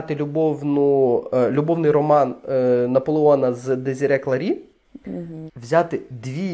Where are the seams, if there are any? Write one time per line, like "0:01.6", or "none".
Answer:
0:05.5